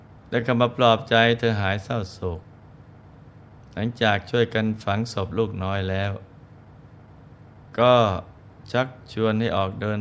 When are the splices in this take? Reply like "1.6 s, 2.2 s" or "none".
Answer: none